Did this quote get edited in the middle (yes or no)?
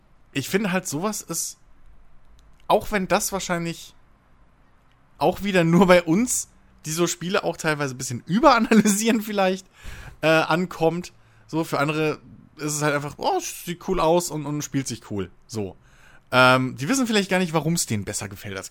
no